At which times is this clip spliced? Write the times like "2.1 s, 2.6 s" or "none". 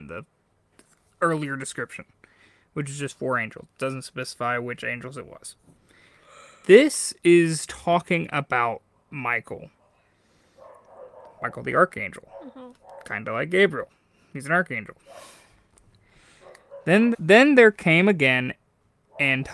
17.1 s